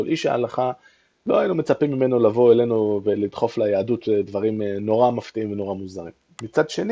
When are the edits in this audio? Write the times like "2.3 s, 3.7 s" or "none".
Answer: none